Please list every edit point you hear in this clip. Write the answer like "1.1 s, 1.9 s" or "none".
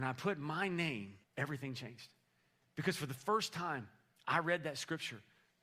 1.2 s

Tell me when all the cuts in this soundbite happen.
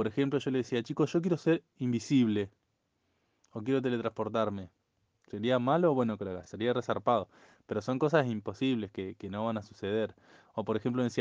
none

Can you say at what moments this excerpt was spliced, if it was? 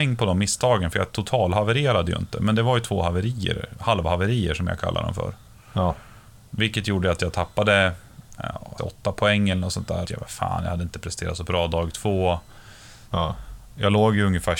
8.8 s, 10.0 s, 13.1 s

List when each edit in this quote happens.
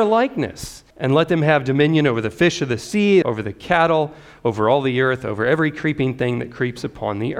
0.9 s, 3.2 s

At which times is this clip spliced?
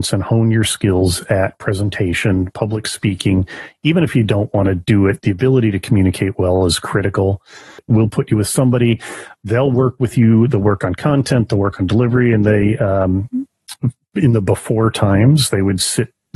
none

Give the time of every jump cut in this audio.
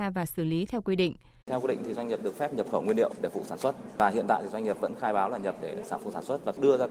1.4 s

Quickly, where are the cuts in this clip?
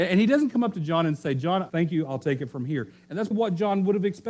1.7 s, 3.3 s

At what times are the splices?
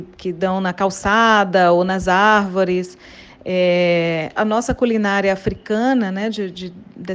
4.4 s

